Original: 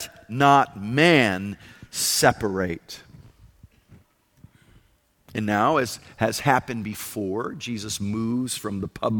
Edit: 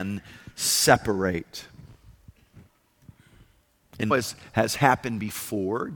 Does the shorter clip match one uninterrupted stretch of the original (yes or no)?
no